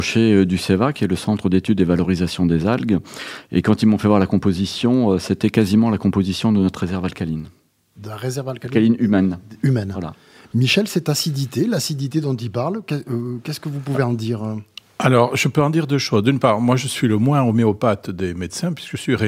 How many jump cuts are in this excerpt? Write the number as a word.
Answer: zero